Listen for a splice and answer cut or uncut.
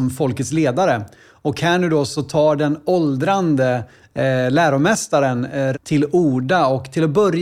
cut